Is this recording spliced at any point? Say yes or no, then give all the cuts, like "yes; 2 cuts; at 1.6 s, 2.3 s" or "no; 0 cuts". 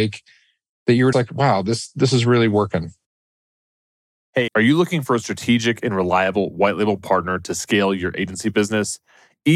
yes; 2 cuts; at 1.1 s, 4.5 s